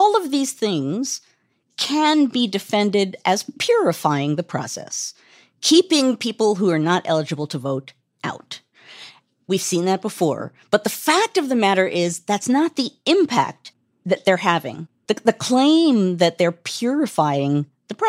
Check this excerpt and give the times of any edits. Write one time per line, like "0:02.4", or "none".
0:15.1